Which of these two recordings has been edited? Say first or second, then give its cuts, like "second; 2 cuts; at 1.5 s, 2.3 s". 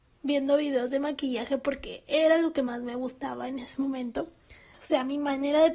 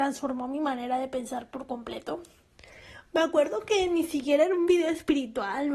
first; 1 cut; at 4.7 s